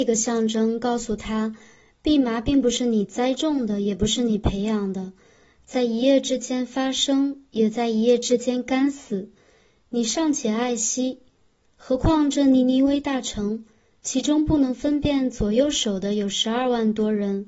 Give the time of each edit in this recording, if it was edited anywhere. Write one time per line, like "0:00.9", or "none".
none